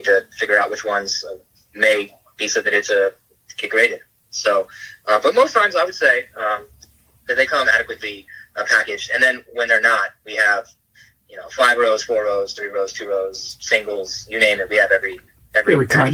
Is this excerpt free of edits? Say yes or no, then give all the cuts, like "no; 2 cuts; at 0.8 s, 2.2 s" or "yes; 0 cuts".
yes; 0 cuts